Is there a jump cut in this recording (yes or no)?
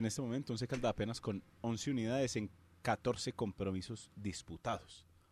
no